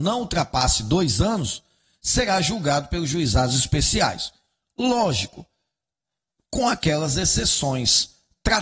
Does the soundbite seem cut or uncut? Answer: uncut